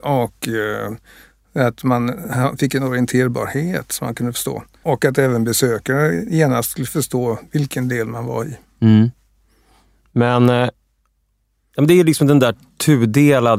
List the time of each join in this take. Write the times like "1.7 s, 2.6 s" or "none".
4.8 s